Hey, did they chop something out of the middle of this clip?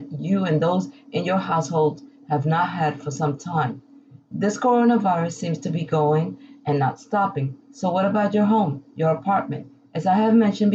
no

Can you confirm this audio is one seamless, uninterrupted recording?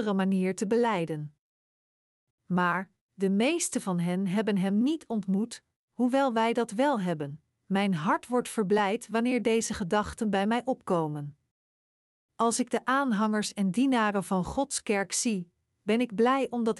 no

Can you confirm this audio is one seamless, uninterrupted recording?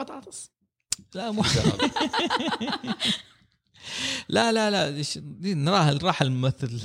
yes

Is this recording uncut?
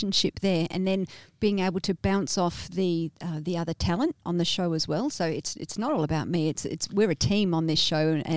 yes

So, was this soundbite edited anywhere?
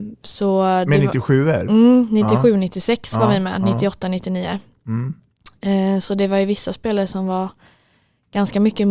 no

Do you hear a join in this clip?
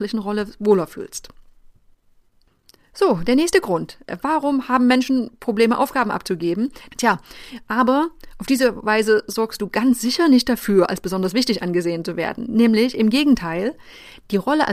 yes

